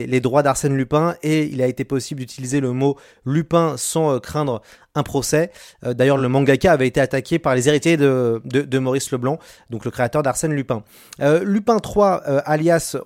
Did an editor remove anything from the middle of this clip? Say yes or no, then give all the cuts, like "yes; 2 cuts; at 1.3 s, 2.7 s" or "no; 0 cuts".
no; 0 cuts